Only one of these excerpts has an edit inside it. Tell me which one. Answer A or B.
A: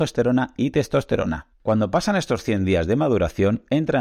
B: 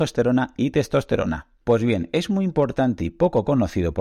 A